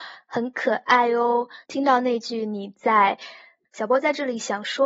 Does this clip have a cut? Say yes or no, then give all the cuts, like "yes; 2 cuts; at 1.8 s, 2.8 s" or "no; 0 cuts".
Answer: yes; 2 cuts; at 1.6 s, 3.6 s